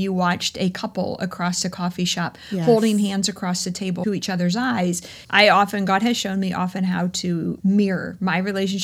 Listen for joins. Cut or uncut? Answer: cut